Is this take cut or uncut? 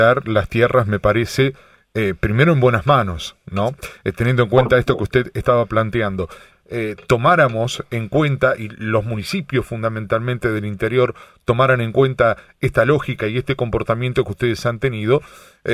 cut